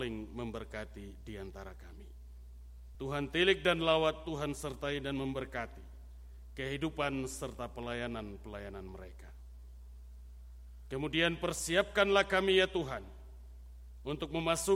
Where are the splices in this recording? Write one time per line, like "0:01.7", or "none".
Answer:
0:02.9